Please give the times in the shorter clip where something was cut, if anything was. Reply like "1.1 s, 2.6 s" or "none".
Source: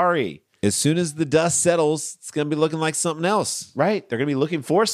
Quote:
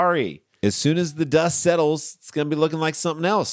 none